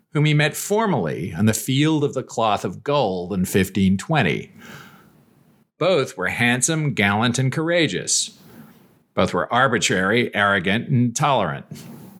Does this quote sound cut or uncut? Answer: uncut